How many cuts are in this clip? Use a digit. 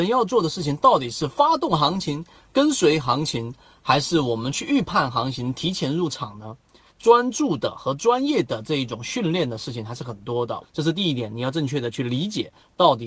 2